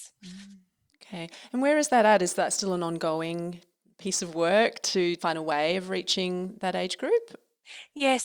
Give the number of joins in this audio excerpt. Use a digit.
0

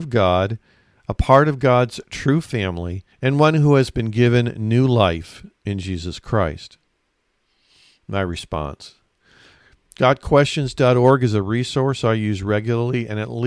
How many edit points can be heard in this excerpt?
1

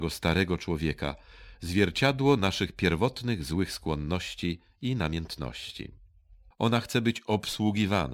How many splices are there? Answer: 1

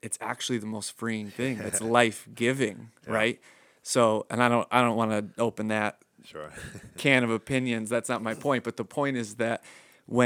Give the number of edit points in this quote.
0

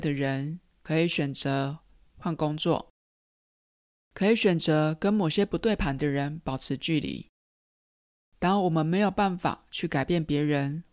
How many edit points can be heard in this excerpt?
0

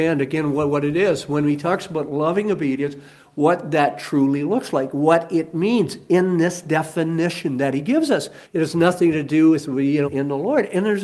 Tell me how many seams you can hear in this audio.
2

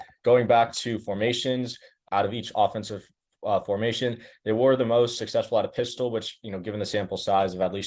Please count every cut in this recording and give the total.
1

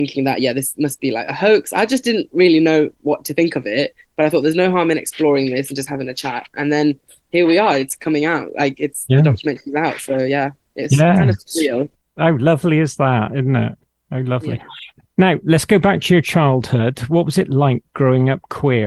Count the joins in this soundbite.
0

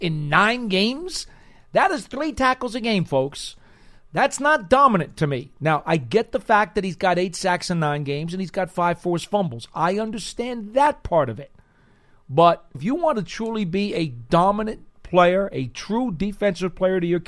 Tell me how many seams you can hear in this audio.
1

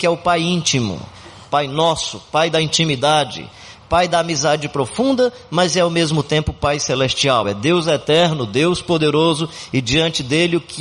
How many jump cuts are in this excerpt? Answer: 0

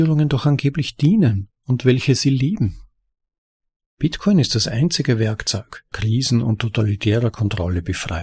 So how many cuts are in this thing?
1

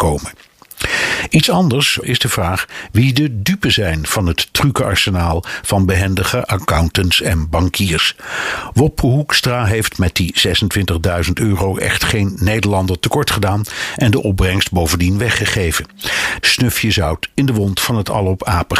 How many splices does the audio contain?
2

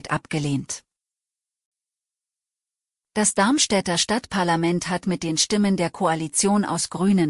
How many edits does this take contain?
1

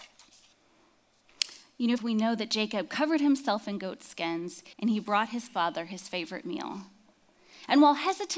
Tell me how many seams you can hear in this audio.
2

